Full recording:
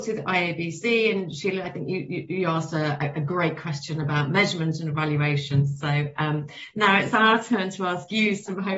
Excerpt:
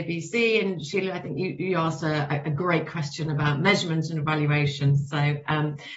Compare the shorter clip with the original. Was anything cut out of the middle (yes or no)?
yes